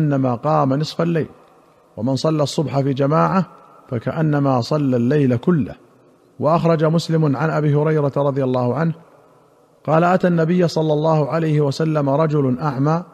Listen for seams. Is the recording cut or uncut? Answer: uncut